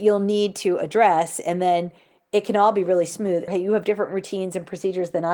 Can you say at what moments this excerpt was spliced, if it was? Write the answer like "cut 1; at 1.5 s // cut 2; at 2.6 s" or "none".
cut 1; at 3.5 s